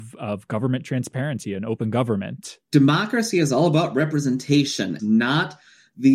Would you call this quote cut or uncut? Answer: cut